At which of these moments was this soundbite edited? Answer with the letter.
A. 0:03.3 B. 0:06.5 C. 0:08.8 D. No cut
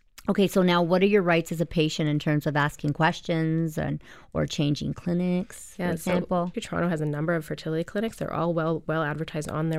B